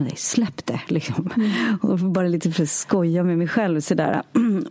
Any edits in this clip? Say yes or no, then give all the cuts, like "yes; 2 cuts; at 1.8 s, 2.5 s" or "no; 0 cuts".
no; 0 cuts